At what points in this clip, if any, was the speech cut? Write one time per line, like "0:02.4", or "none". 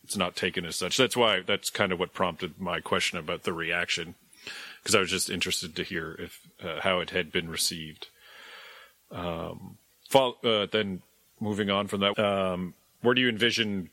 0:09.9
0:12.1